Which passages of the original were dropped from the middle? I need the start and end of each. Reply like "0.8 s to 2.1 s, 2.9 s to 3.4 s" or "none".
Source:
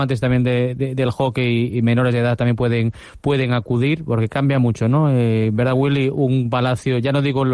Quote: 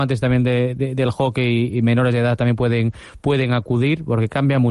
none